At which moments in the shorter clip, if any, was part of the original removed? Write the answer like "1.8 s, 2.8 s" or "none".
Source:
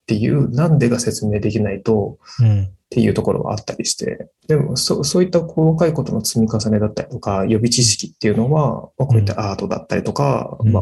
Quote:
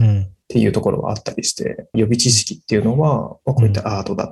1.9 s